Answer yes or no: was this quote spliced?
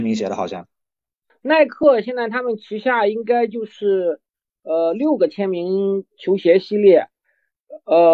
no